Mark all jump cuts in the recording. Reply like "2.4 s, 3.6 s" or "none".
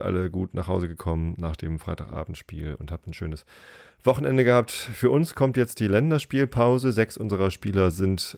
none